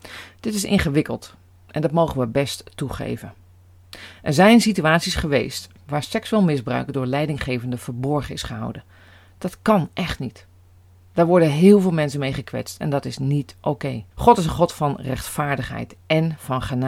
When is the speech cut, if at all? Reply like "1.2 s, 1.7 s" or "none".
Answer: 5.8 s, 14.1 s